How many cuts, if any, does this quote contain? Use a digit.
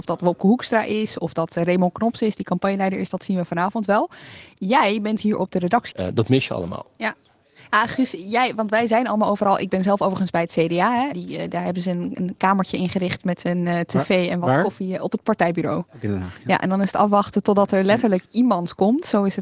2